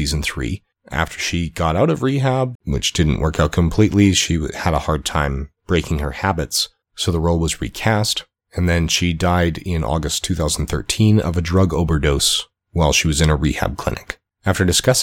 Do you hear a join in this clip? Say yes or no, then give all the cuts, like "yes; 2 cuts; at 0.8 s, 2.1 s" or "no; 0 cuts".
yes; 1 cut; at 2.6 s